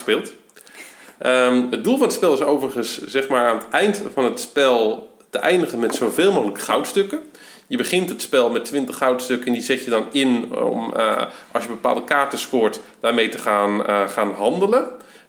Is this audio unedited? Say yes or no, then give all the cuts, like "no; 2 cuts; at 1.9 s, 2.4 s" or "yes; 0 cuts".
yes; 0 cuts